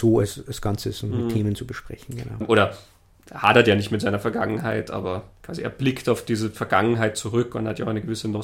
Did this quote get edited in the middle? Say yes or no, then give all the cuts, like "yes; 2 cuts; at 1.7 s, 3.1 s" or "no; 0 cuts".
yes; 2 cuts; at 2.4 s, 5.3 s